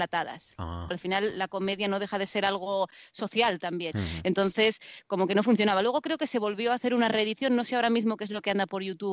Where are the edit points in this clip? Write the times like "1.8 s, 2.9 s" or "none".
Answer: 0.9 s, 3.9 s